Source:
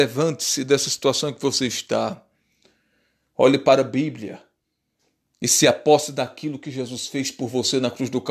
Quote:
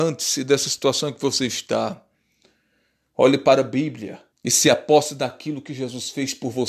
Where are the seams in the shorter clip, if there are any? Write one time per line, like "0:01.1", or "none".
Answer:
0:04.3